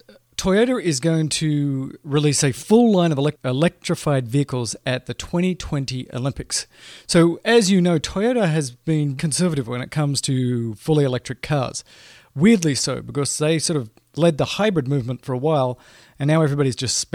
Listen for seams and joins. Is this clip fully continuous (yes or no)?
no